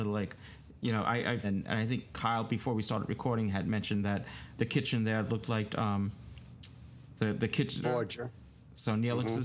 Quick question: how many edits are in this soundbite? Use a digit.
3